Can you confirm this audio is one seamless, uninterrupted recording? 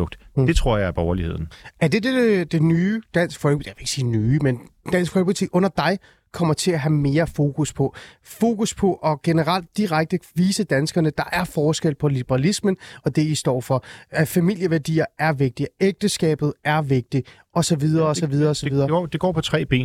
yes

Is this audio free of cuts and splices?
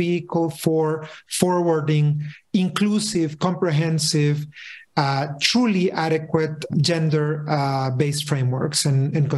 no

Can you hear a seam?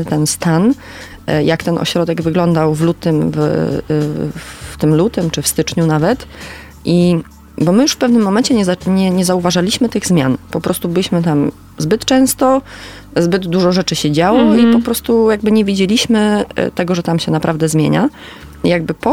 no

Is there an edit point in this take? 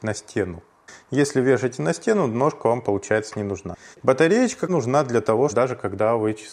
yes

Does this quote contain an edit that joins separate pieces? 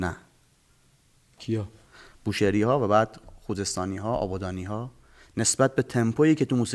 no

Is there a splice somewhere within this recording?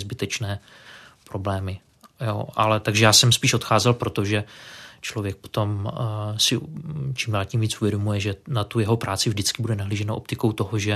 no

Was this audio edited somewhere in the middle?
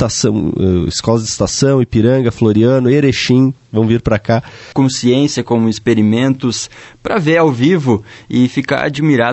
yes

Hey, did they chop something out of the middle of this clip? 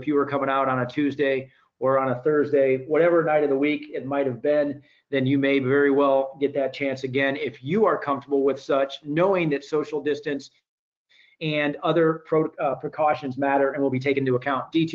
no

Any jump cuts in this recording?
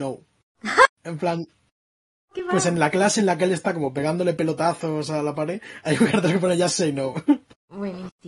no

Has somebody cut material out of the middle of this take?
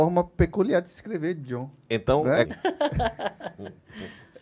yes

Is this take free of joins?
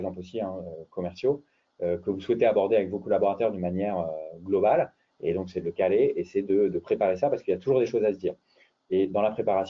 no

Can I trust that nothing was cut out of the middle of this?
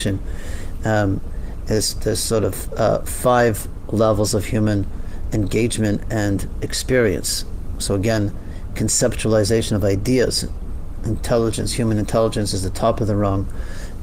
yes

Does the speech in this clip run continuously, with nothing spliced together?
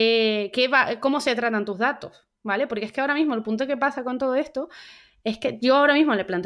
yes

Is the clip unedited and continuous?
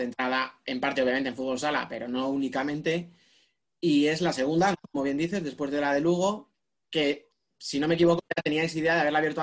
yes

